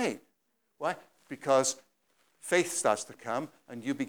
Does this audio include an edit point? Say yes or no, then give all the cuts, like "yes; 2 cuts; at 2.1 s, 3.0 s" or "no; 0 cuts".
no; 0 cuts